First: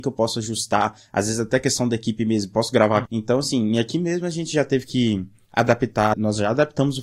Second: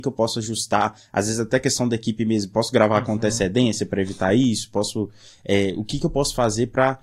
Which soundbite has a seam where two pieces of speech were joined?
first; 2 cuts; at 3.1 s, 6.1 s

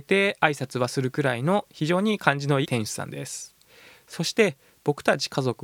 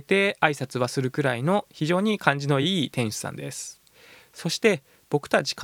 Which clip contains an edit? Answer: first; 1 cut; at 2.6 s

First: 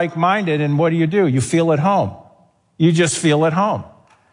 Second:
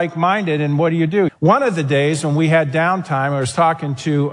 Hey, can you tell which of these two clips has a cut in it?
second; 1 cut; at 1.3 s

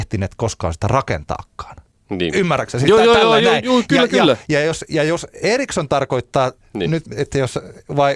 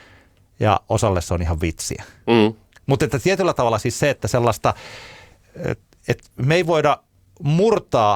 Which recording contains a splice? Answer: first; 1 cut; at 6.6 s

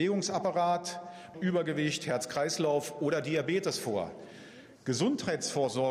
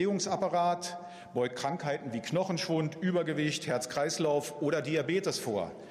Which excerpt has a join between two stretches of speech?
first; 1 cut; at 1.3 s

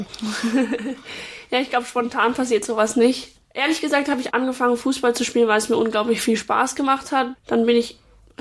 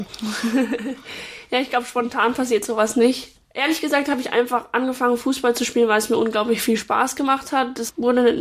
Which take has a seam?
first; 2 cuts; at 4.3 s, 7.3 s

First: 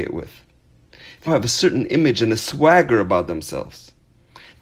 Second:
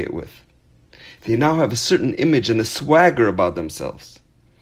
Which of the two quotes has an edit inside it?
first; 1 cut; at 1.3 s

